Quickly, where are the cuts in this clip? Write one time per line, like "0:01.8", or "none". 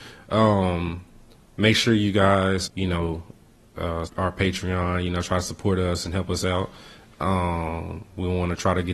0:02.7
0:04.1